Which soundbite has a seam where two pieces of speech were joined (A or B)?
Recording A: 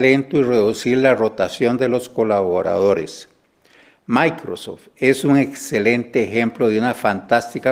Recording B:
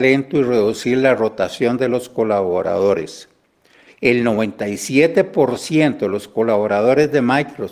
B